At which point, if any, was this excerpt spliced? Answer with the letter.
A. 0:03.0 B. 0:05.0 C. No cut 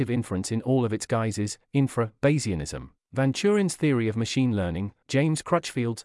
B